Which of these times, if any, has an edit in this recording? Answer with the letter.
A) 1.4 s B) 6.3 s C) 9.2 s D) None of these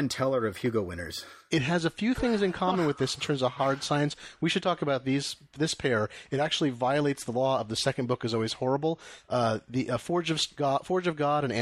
D